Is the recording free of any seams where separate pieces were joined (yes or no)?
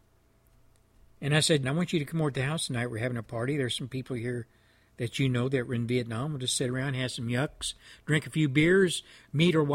no